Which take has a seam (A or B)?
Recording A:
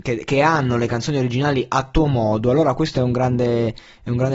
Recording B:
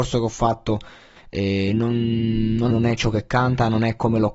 B